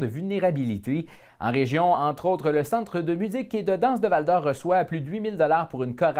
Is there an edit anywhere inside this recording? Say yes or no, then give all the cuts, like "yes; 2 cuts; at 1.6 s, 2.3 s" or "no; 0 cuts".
no; 0 cuts